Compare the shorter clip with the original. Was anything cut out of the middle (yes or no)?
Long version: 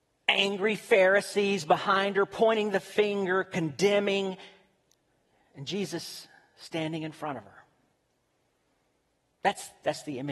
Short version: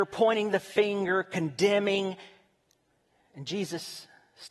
no